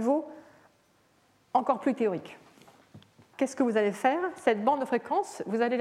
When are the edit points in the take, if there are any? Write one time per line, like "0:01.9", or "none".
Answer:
0:03.3